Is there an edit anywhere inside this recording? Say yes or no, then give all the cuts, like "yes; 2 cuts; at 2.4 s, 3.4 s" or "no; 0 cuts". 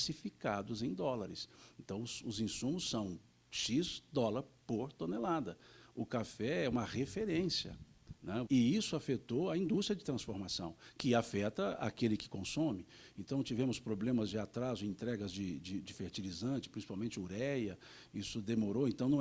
yes; 1 cut; at 8.5 s